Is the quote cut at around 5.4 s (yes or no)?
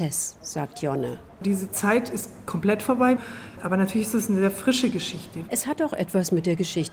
yes